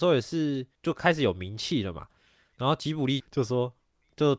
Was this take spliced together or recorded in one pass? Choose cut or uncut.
cut